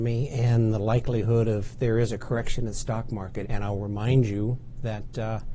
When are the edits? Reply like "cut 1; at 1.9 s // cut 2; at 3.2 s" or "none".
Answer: cut 1; at 3.4 s